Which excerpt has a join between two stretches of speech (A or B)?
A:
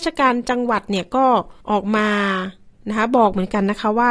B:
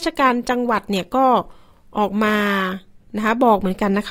A